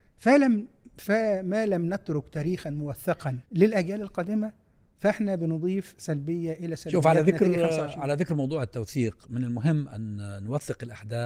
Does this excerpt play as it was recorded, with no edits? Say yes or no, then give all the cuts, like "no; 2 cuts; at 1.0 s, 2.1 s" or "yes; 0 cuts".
no; 1 cut; at 3.4 s